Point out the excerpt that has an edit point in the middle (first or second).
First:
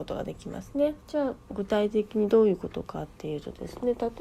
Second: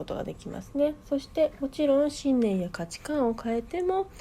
first